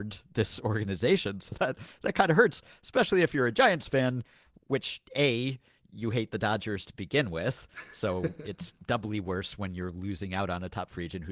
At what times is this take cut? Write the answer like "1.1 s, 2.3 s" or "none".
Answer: none